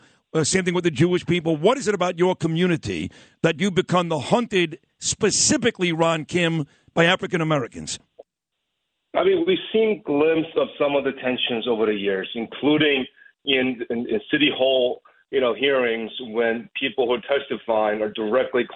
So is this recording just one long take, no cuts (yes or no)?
no